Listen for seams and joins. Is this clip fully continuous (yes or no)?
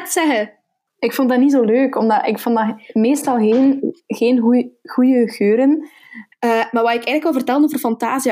no